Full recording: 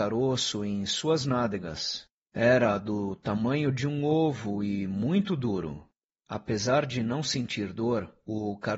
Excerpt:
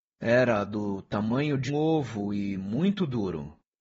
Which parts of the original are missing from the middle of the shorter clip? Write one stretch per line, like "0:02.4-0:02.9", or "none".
0:03.8-0:04.0